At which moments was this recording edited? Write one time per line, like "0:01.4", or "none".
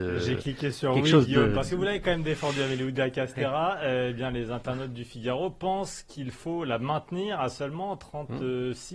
none